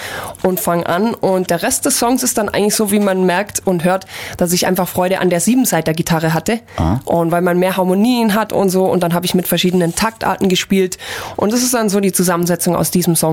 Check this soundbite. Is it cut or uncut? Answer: uncut